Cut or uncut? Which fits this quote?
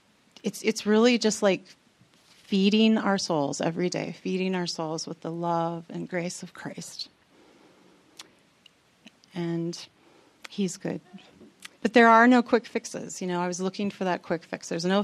cut